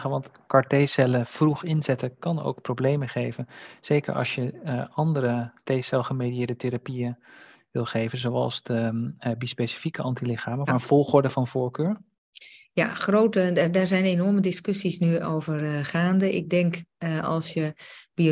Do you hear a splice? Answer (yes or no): yes